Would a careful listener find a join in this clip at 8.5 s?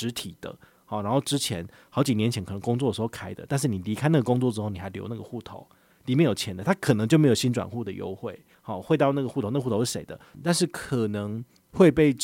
yes; 2 cuts; at 8.5 s, 10.3 s

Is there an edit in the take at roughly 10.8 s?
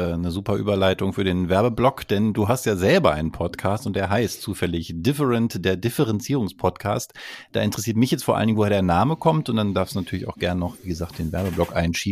no; 0 cuts

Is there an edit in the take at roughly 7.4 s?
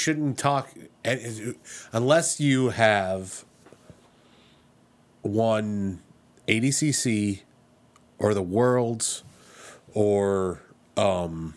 no; 0 cuts

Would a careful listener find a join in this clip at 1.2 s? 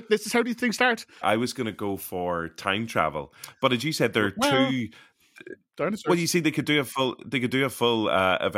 yes; 1 cut; at 1.2 s

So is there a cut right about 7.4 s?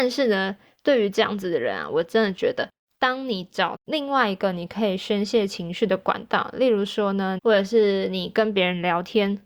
yes; 1 cut; at 7.4 s

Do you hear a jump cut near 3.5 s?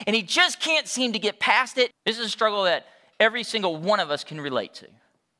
no; 1 cut; at 1.9 s

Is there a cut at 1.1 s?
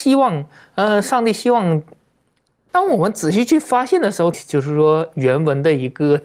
no; 2 cuts; at 2.7 s, 4.3 s

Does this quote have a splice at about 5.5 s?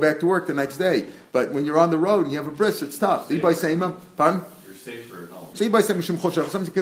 yes; 1 cut; at 5.5 s

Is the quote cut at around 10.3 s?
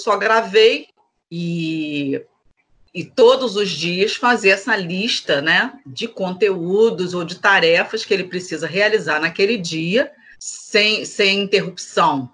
yes; 2 cuts; at 1.1 s, 10.3 s

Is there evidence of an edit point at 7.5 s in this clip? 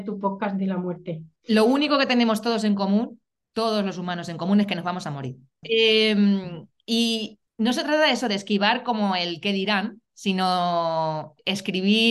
yes; 3 cuts; at 1.4 s, 5.6 s, 7.5 s

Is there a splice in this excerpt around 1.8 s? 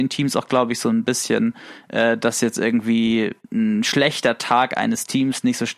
no; 0 cuts

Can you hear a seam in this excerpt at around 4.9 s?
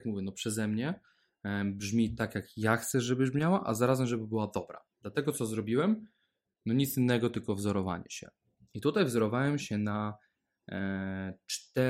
no; 0 cuts

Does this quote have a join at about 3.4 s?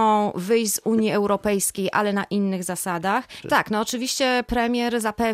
yes; 1 cut; at 3.4 s

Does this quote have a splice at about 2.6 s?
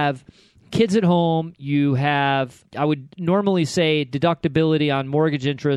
yes; 1 cut; at 2.6 s

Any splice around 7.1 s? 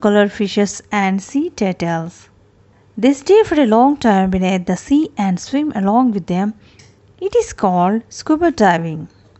no; 0 cuts

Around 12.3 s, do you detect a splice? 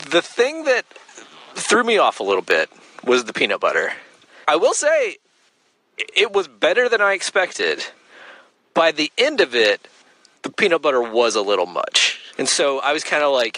yes; 2 cuts; at 4.4 s, 12.3 s

